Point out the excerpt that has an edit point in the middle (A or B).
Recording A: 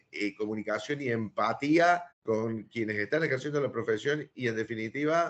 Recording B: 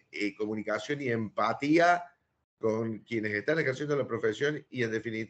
A